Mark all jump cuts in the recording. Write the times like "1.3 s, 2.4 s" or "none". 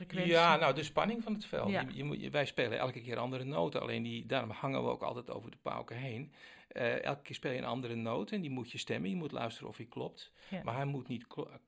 none